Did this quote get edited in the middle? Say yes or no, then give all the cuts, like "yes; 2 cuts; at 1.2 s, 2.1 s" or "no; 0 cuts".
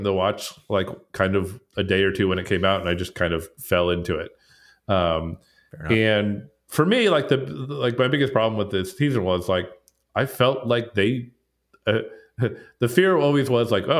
no; 0 cuts